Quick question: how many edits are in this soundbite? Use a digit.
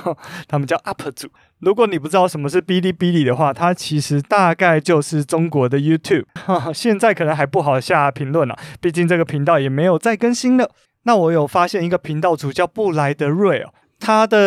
2